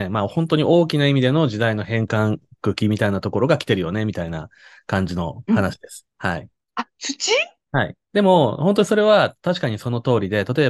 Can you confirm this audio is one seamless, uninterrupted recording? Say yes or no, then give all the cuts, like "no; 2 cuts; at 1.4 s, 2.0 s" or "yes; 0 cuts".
no; 1 cut; at 6.6 s